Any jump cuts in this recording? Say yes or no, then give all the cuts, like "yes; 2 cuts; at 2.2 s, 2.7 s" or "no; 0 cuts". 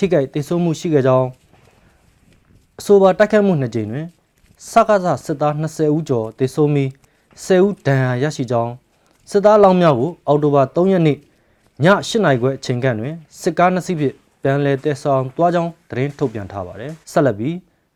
yes; 1 cut; at 17.0 s